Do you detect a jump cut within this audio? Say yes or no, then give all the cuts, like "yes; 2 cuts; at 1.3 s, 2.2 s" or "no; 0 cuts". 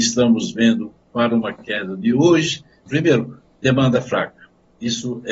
yes; 1 cut; at 2.9 s